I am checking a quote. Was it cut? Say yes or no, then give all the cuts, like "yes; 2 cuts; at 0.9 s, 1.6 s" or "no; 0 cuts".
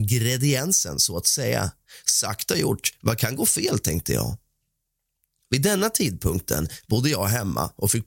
no; 0 cuts